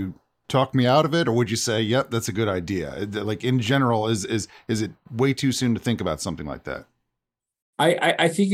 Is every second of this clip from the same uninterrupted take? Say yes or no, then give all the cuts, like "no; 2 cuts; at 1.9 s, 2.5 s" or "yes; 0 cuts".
yes; 0 cuts